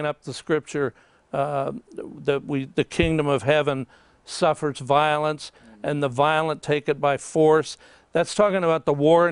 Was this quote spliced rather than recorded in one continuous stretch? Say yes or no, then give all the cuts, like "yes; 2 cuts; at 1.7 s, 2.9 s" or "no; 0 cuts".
no; 0 cuts